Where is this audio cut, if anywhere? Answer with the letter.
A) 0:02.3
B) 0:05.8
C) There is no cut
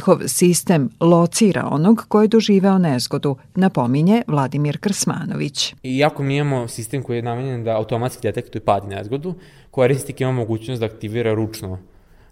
B